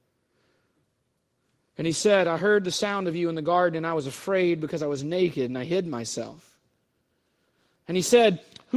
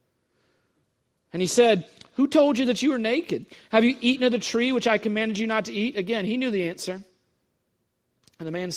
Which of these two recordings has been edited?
second; 1 cut; at 1.2 s

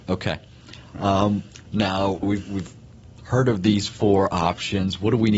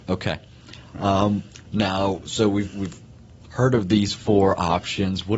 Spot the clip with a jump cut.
first; 1 cut; at 2.2 s

